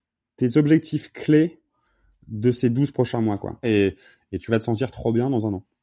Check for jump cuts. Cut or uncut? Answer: cut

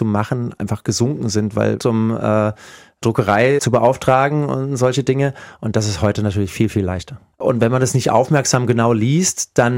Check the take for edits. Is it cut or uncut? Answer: cut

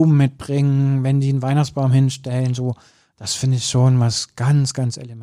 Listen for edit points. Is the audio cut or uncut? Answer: uncut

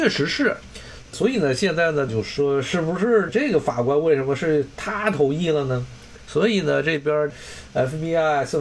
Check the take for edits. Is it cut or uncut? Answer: cut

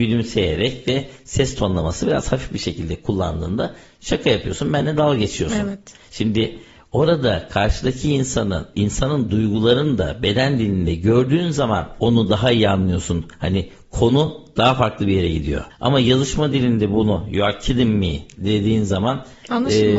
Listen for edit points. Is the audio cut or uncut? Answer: uncut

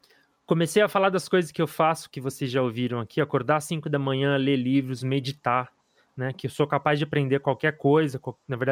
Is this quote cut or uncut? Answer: uncut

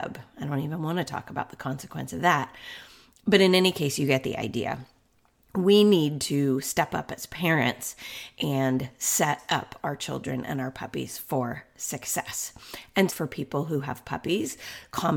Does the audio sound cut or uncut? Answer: cut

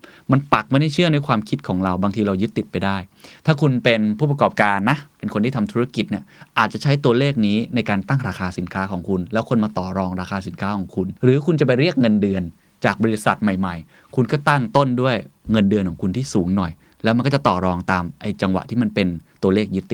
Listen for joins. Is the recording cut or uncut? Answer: cut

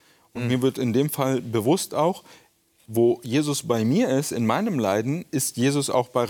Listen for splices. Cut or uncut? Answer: uncut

